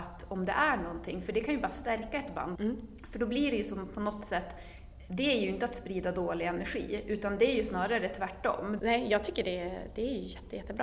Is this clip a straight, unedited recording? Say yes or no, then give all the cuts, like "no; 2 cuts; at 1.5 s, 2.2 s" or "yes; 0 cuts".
no; 2 cuts; at 2.5 s, 8.8 s